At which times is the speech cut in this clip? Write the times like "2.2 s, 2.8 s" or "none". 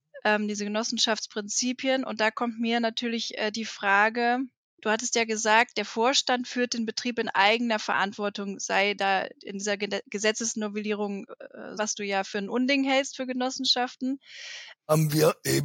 11.8 s, 14.7 s

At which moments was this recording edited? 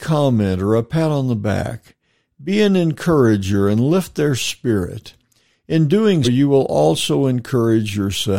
6.2 s

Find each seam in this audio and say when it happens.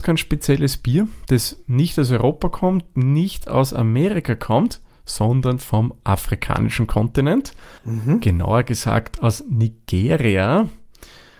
7.8 s

